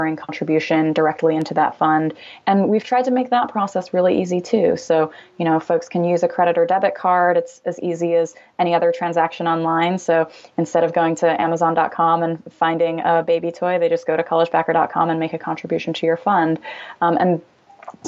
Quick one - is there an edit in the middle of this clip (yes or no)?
no